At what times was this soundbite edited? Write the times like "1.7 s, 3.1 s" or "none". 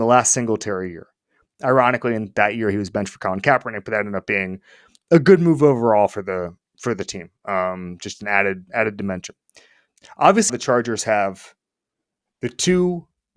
10.5 s